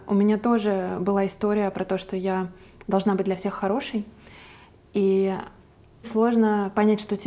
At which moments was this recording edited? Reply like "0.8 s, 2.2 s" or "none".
6.0 s